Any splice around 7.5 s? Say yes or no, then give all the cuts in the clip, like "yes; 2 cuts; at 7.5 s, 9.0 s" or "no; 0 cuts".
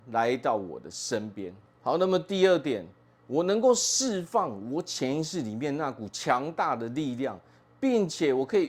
no; 1 cut; at 1.8 s